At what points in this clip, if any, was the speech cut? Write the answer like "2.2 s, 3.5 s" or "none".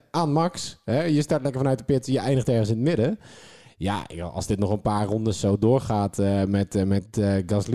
none